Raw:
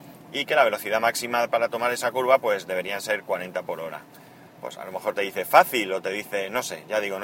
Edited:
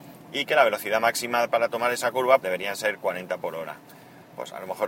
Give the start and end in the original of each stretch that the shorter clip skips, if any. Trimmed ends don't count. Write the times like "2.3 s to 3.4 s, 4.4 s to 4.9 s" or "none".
2.4 s to 2.6 s